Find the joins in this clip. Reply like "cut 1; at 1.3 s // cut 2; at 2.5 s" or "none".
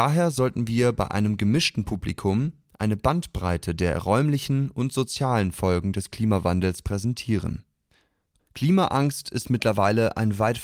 cut 1; at 8.4 s